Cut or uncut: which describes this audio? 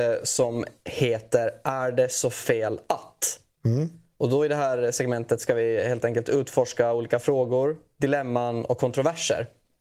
uncut